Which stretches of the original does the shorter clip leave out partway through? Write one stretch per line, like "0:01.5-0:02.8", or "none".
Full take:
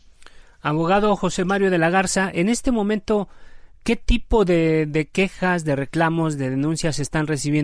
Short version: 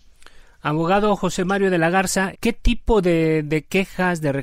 0:02.3-0:03.8